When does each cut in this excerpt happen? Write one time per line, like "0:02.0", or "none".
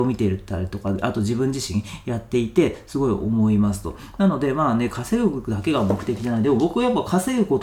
none